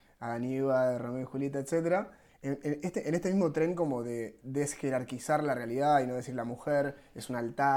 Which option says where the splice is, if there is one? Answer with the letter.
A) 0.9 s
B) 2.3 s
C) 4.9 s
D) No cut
B